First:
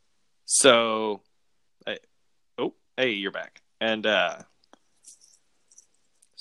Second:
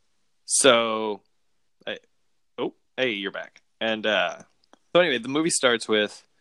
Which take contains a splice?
second; 1 cut; at 4.9 s

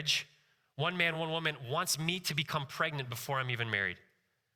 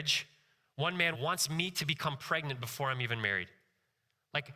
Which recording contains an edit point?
second; 1 cut; at 1.1 s

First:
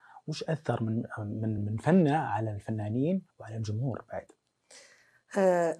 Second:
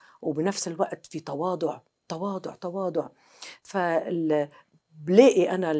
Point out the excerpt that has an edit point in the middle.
first; 2 cuts; at 1.6 s, 3.3 s

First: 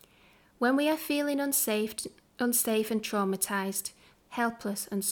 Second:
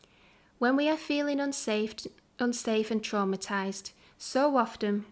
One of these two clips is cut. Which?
first; 1 cut; at 4.1 s

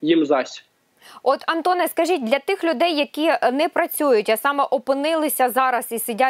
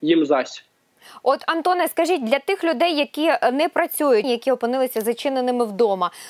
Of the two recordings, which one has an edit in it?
second; 1 cut; at 4.2 s

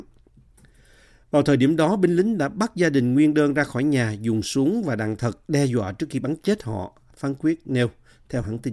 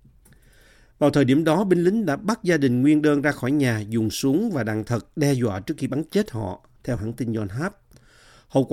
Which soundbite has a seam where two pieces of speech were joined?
second; 1 cut; at 6.8 s

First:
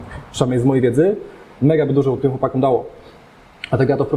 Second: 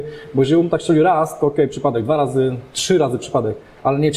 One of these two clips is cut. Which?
first; 1 cut; at 2.2 s

